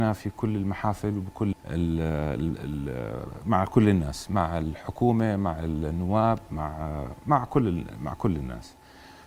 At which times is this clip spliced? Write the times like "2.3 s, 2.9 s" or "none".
1.5 s